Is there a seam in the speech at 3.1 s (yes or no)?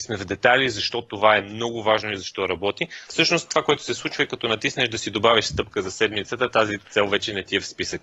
yes